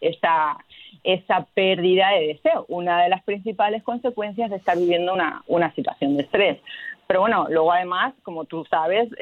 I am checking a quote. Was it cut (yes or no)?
no